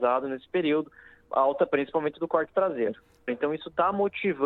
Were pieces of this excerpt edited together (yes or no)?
yes